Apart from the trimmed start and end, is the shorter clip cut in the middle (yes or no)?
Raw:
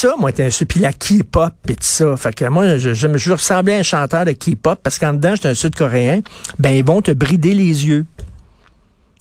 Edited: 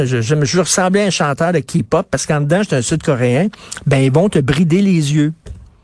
no